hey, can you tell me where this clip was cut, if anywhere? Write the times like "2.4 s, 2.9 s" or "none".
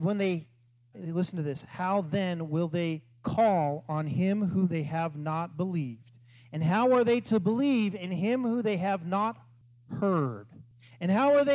0.9 s